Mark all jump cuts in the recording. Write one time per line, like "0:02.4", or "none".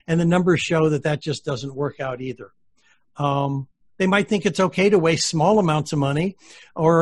none